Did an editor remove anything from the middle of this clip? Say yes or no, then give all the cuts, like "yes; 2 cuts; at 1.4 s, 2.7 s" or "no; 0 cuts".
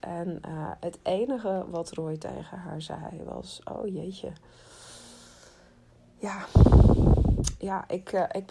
no; 0 cuts